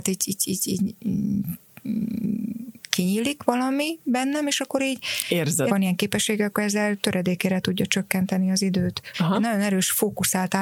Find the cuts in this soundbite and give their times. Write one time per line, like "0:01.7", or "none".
0:05.7
0:09.1